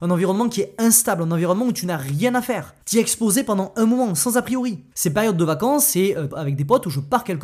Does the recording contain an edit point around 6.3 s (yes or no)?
yes